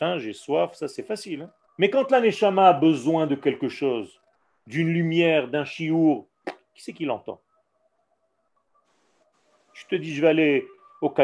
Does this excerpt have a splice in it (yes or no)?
yes